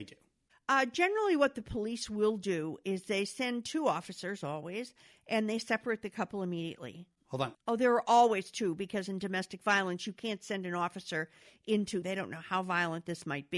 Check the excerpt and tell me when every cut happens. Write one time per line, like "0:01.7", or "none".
0:07.5
0:12.0